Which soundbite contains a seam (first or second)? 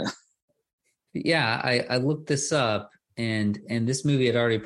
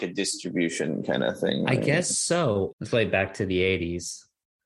second